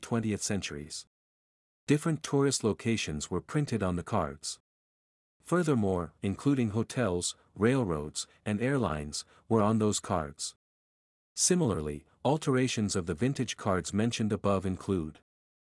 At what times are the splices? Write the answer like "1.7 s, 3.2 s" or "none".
6.2 s